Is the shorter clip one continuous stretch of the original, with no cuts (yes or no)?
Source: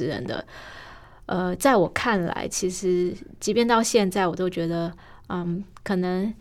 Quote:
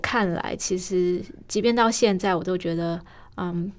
yes